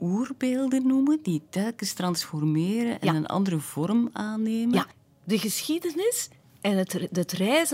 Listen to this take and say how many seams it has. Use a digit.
0